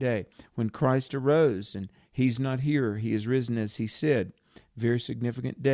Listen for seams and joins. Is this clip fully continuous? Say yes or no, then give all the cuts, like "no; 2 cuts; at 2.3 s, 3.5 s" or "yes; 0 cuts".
yes; 0 cuts